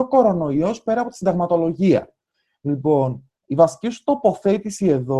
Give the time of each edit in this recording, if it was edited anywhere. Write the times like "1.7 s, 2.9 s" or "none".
none